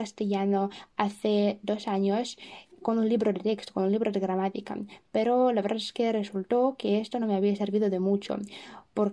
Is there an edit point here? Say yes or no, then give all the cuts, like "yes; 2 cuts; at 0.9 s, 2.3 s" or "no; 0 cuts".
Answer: no; 0 cuts